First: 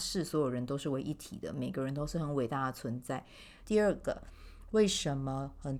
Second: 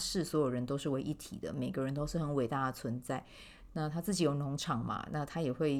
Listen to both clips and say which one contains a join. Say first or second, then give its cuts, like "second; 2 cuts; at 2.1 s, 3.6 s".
first; 1 cut; at 3.6 s